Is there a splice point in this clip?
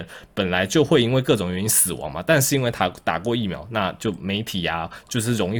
no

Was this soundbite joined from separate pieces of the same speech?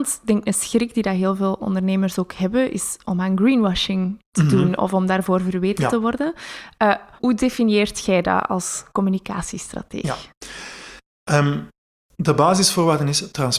yes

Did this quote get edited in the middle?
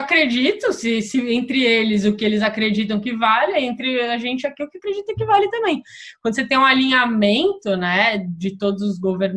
no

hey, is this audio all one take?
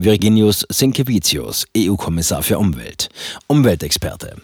no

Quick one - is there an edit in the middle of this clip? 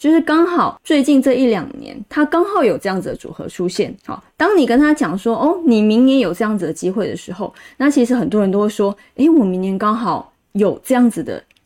no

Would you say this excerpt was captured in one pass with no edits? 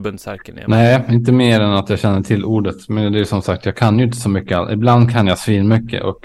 yes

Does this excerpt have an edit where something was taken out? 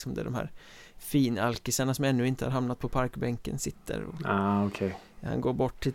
no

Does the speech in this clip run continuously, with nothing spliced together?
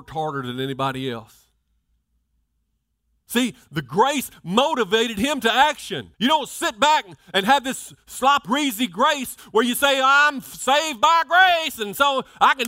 no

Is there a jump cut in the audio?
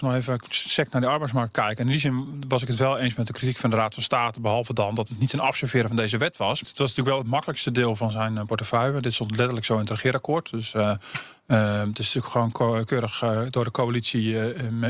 yes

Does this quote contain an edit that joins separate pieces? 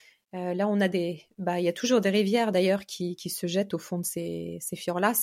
no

